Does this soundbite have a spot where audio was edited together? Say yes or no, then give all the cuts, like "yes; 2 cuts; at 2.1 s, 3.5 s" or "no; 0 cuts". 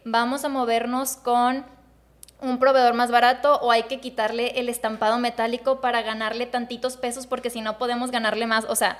no; 0 cuts